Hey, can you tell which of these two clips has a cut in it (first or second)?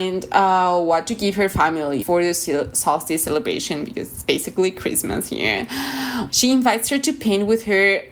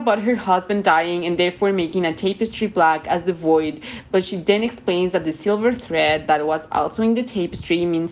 first